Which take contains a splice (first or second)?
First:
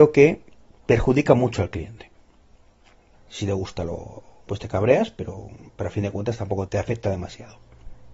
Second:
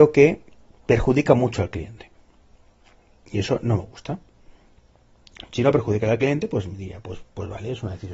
first